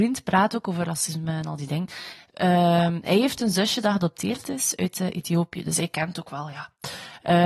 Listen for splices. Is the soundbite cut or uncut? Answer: uncut